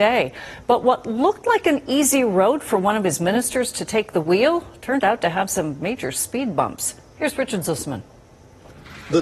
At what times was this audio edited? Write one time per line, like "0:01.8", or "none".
none